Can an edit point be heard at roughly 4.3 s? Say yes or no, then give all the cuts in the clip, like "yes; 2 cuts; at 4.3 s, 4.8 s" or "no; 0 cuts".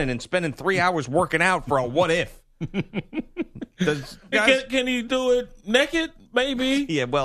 yes; 1 cut; at 4.3 s